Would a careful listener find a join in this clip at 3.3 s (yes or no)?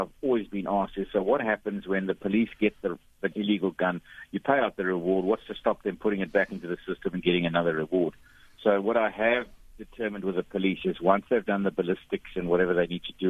yes